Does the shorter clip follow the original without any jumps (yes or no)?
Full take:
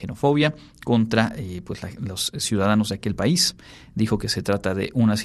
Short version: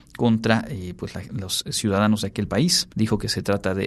no